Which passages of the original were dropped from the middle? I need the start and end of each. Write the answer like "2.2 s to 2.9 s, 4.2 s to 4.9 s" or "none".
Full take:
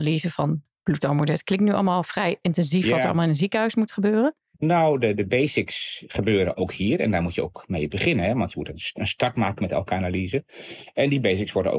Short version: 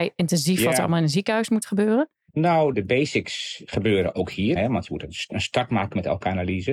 5.0 s to 5.2 s, 7.0 s to 8.2 s